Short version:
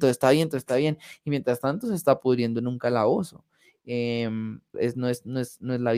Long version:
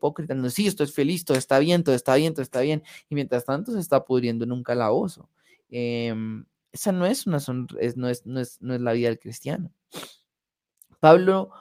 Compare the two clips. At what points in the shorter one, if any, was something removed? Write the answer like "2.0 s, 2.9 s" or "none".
4.7 s

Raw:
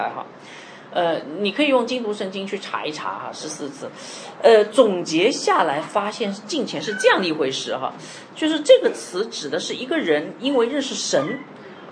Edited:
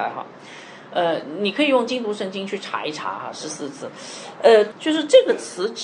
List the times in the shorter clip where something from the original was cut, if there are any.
4.7 s

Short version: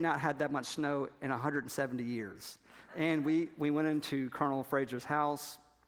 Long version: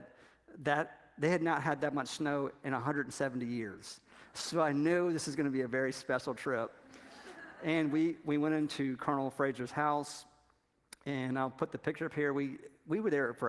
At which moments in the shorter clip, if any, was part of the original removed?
2.9 s

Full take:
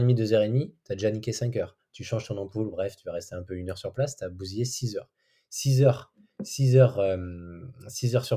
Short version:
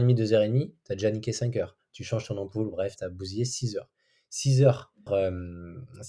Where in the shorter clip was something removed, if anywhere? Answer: 3.0 s, 5.1 s

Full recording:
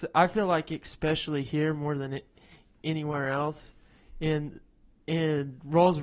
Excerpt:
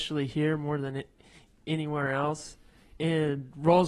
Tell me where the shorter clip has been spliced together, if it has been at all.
3.0 s

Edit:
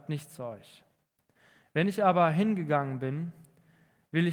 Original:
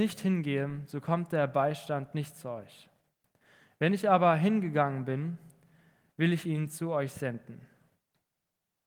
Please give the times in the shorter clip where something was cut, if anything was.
none

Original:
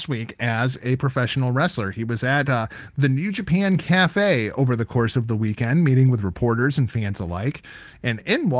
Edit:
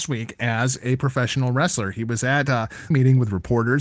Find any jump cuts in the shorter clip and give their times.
2.9 s

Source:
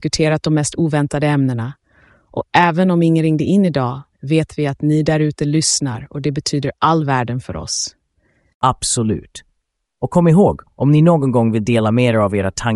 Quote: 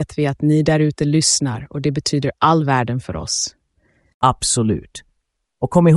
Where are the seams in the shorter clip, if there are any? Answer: none

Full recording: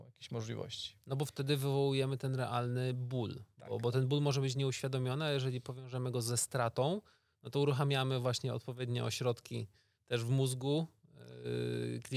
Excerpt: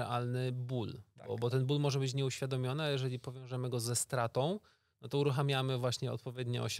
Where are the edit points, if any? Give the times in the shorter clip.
none

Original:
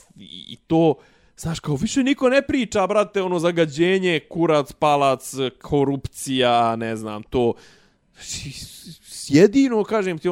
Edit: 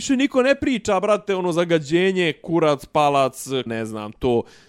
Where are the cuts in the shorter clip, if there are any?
3.7 s

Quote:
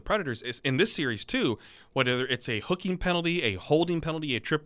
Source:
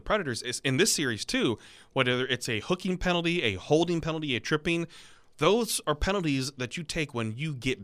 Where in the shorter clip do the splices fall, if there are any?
none

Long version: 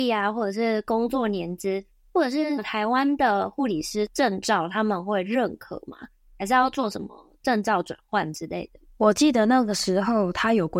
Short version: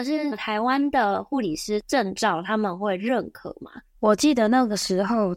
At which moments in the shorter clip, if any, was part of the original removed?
3.9 s

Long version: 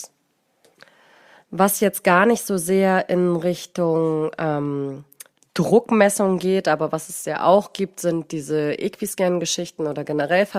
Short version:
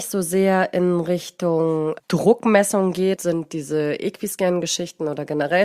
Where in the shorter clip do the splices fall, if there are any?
2.0 s, 3.2 s

